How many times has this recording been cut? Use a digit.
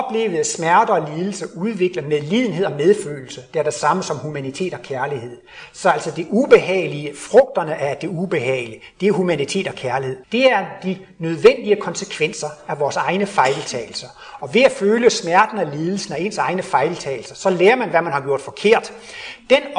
1